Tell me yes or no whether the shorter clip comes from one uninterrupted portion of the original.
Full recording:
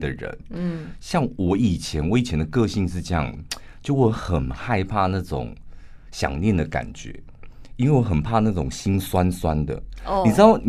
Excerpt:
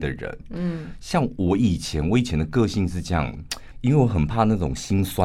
no